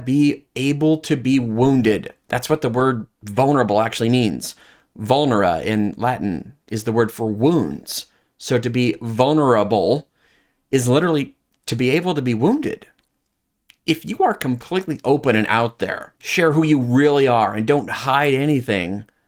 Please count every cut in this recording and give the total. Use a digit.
1